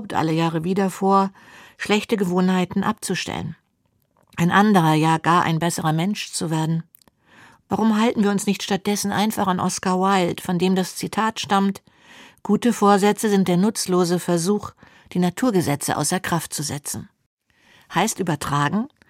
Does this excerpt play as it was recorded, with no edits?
yes; 0 cuts

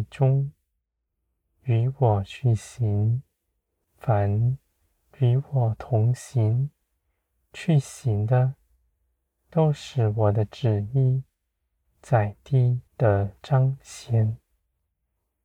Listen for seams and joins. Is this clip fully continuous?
no; 2 cuts; at 3.8 s, 12.9 s

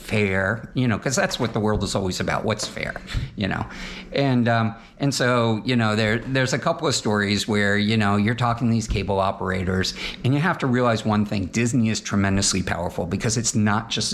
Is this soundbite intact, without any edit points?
yes; 0 cuts

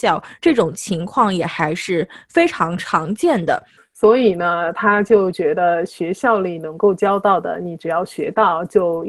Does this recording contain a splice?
yes; 1 cut; at 3.8 s

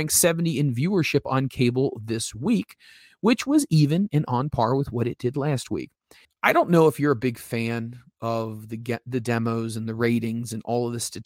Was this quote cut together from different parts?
yes; 1 cut; at 6.2 s

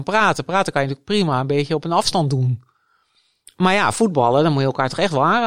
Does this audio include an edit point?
no; 0 cuts

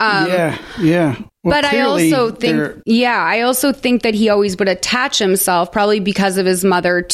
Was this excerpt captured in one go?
no; 1 cut; at 1.3 s

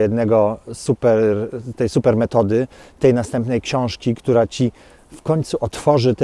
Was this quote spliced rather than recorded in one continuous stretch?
no; 0 cuts

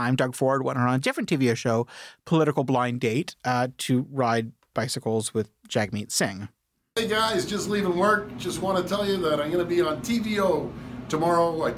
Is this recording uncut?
yes; 0 cuts

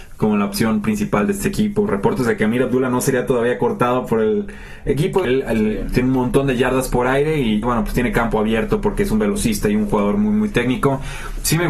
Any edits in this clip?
yes; 2 cuts; at 5.2 s, 7.6 s

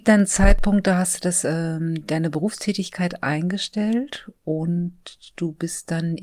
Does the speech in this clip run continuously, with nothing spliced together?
yes; 0 cuts

